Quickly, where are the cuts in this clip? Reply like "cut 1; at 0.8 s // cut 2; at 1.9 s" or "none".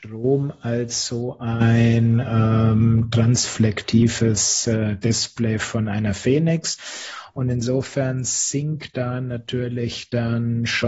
none